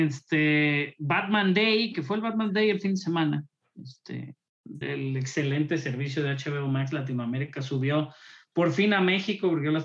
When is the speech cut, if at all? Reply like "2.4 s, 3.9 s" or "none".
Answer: 4.8 s